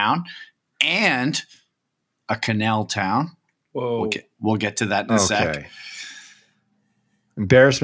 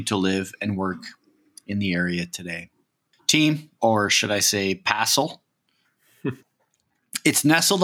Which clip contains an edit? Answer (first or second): second